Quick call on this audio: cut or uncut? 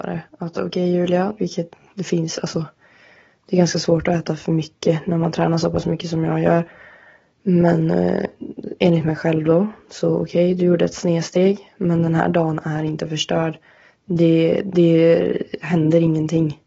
cut